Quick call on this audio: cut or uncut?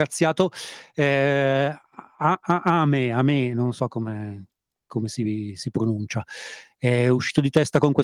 uncut